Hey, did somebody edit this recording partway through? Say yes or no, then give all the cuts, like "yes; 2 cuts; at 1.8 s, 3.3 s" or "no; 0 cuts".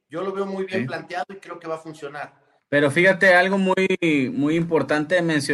yes; 1 cut; at 2.6 s